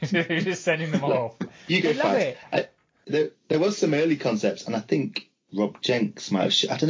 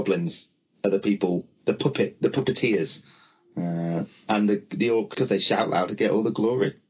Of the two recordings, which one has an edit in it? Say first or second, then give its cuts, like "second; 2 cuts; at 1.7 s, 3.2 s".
second; 1 cut; at 5.1 s